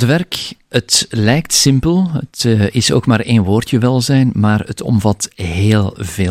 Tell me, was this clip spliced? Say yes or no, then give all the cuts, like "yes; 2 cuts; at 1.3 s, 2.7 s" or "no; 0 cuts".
no; 0 cuts